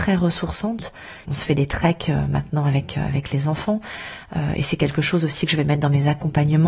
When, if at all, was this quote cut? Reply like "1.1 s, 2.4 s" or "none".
1.3 s